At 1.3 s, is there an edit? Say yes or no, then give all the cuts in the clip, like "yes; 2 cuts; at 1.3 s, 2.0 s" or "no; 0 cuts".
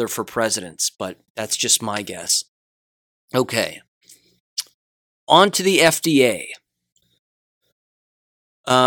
yes; 1 cut; at 1.3 s